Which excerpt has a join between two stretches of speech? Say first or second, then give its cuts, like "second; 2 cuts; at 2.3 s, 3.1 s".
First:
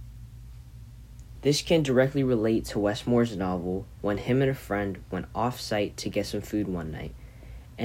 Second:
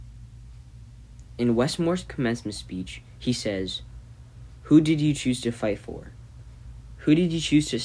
first; 1 cut; at 1.4 s